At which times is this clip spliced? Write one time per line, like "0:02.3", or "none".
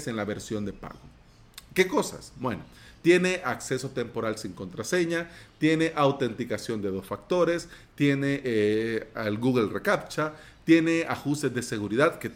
none